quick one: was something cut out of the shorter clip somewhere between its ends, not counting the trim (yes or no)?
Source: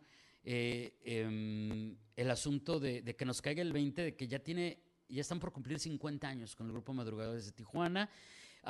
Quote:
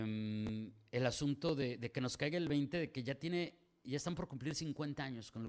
no